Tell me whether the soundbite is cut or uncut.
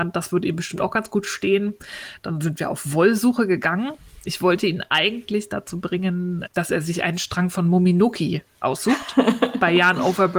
cut